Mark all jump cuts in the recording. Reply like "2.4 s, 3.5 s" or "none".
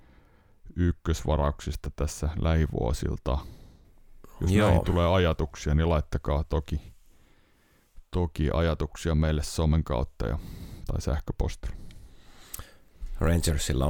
none